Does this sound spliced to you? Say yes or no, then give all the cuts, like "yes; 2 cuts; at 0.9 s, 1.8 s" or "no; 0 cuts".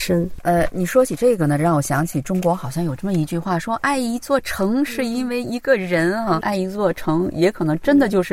yes; 1 cut; at 6.4 s